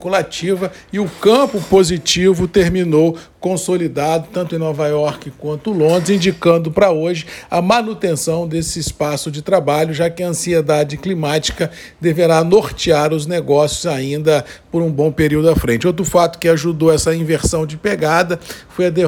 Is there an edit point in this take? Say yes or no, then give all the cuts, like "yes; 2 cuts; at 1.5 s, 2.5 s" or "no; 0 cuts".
no; 0 cuts